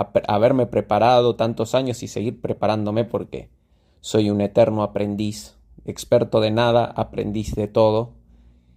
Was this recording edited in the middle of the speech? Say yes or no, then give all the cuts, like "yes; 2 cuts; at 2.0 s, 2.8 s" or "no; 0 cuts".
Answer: no; 0 cuts